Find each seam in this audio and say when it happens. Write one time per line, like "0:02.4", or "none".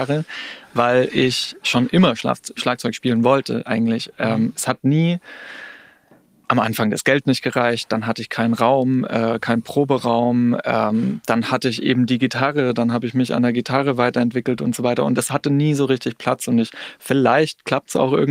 none